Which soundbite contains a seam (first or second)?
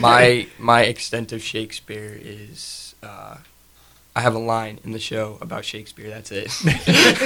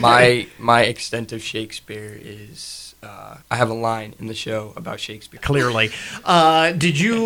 second